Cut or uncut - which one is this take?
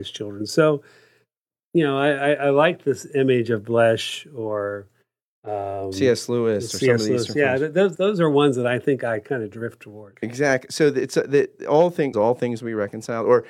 cut